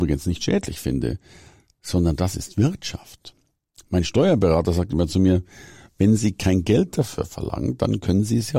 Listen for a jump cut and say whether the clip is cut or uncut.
uncut